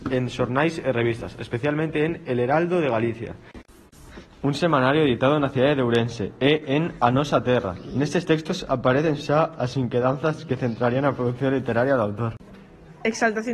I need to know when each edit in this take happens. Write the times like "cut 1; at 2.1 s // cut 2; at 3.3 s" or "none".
none